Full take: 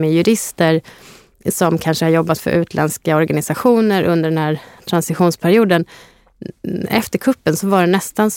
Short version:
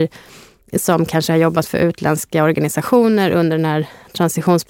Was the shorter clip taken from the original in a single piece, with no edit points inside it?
yes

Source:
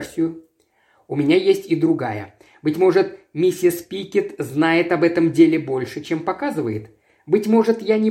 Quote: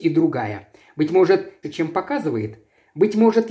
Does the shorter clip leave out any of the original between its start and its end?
yes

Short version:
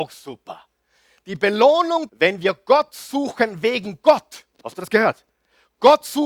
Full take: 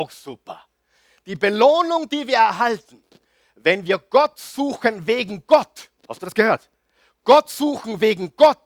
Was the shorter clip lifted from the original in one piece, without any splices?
no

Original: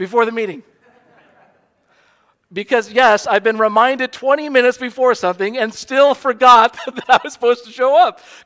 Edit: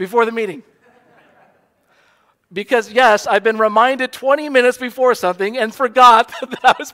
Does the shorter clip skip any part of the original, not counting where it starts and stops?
yes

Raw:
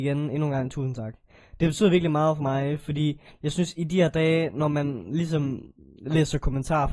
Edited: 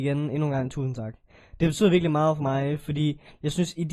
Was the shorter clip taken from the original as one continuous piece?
yes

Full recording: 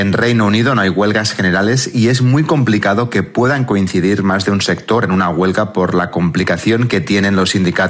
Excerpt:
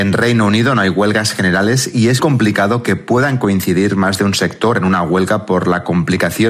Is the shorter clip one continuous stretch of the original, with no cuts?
no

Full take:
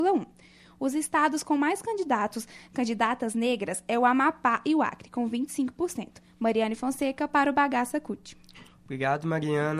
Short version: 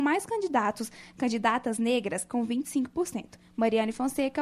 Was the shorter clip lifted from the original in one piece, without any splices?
no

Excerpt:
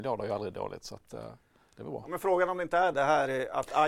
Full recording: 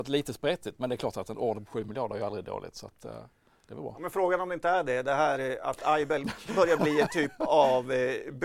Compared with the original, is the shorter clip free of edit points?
no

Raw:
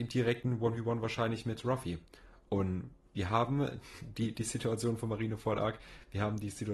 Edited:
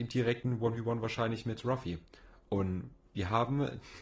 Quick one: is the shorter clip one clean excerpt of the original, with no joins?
yes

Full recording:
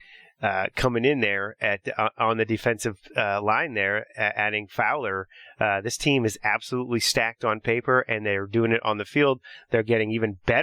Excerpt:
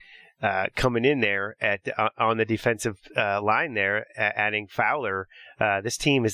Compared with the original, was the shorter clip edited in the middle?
no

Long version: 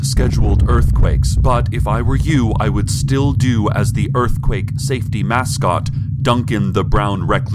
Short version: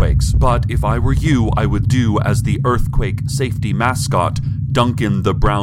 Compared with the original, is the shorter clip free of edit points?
no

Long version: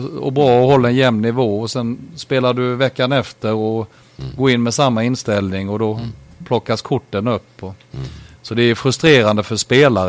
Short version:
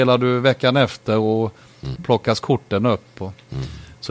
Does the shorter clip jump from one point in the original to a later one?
yes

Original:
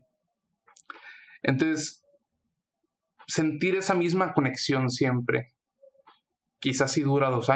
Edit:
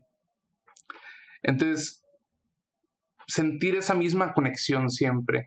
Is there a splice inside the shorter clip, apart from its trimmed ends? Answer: no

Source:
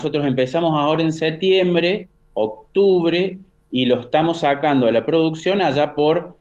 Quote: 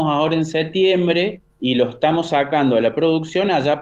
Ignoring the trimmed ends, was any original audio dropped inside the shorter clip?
yes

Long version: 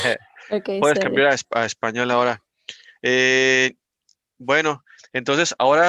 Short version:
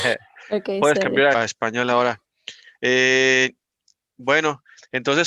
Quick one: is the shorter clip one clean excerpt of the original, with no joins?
no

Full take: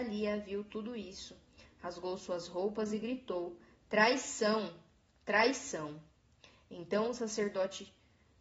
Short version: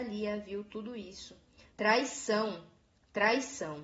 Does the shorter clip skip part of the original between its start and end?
yes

